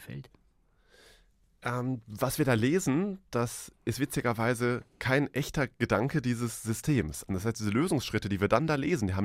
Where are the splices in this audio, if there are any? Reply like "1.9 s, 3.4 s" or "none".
7.3 s